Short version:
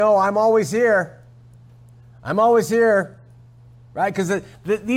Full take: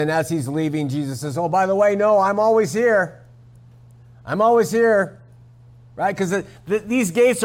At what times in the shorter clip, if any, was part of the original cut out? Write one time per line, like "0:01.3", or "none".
none